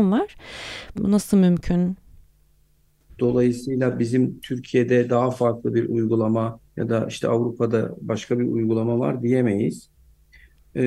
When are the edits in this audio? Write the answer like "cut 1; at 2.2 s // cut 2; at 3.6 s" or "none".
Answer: cut 1; at 1.0 s // cut 2; at 3.1 s // cut 3; at 6.7 s